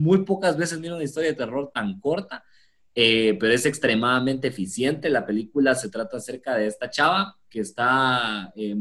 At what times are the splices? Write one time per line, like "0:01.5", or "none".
none